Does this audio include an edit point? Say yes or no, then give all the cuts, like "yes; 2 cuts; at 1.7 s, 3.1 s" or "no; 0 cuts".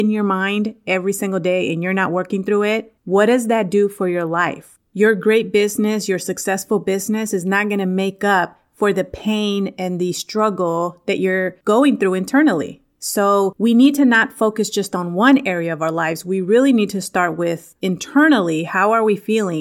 yes; 1 cut; at 3.0 s